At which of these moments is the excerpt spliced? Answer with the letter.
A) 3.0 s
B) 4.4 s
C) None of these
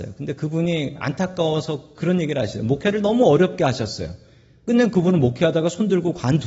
C